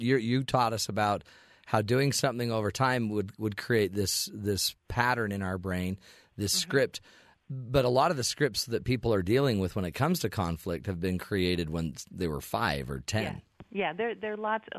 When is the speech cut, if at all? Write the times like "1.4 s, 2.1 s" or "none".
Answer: none